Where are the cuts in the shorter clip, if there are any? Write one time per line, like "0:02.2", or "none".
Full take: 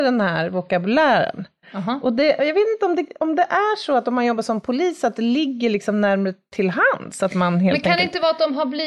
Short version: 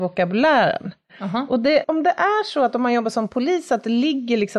0:01.8